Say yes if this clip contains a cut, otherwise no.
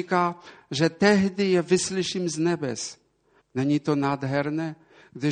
yes